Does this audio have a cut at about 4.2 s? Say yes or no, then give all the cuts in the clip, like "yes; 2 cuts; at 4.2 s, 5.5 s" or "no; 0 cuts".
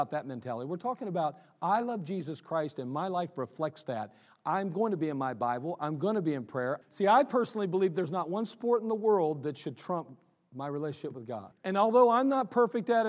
no; 2 cuts; at 6.8 s, 11.5 s